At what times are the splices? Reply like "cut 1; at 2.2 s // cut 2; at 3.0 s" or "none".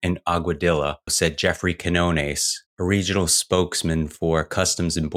cut 1; at 1.1 s // cut 2; at 2.7 s